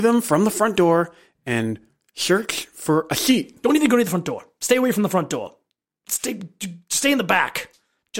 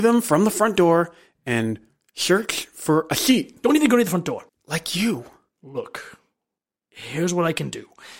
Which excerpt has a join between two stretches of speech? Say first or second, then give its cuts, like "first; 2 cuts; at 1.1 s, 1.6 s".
second; 1 cut; at 4.5 s